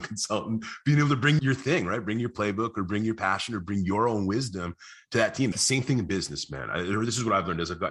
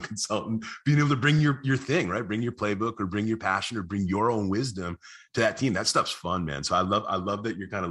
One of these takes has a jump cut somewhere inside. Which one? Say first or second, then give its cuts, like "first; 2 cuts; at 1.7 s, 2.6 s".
first; 2 cuts; at 1.4 s, 5.5 s